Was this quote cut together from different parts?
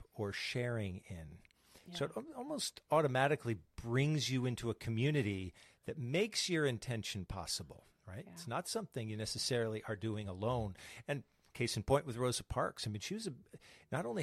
no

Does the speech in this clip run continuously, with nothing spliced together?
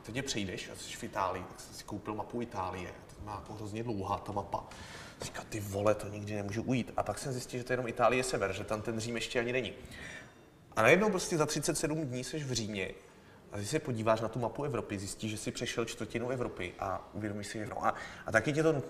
no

